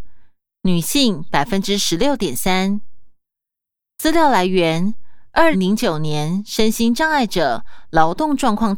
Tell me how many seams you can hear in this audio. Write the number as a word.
one